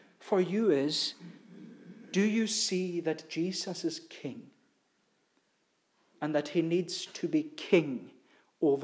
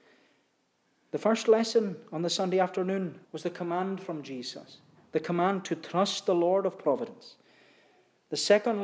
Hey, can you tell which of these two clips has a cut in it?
second; 1 cut; at 3.2 s

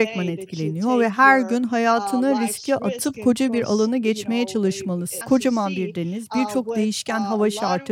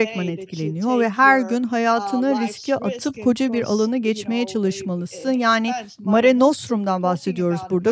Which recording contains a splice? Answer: first; 1 cut; at 5.2 s

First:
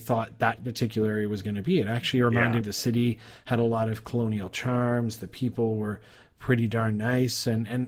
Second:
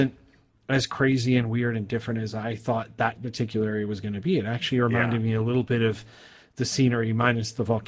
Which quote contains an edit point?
first; 1 cut; at 2.6 s

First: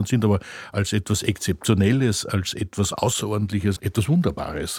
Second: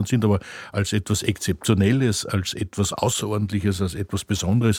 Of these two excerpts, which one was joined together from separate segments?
first; 1 cut; at 3.8 s

